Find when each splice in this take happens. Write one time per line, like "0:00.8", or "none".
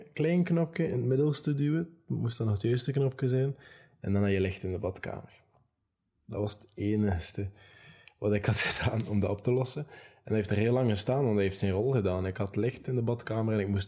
none